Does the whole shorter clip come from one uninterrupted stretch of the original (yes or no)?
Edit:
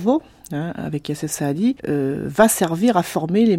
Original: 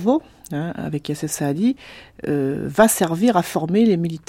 no